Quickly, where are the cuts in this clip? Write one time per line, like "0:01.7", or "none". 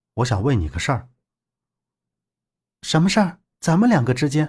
0:03.5